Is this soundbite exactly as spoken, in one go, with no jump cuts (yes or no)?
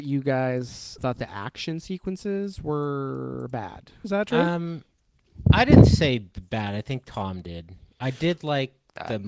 no